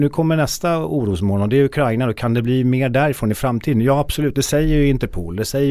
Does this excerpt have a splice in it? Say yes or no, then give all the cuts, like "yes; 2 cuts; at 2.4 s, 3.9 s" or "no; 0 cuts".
no; 0 cuts